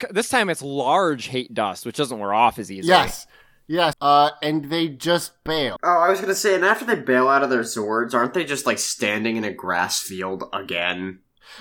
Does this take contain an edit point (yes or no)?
yes